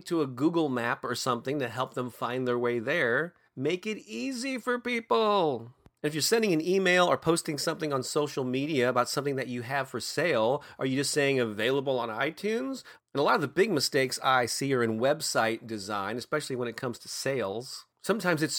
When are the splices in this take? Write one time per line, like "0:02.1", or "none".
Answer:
0:13.0